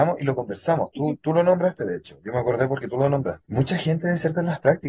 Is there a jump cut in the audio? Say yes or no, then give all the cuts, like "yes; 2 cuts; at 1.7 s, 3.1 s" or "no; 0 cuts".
yes; 1 cut; at 3.4 s